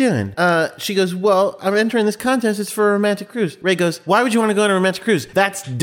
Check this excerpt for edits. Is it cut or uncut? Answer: uncut